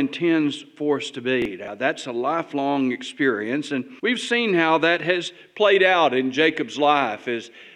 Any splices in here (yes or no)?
yes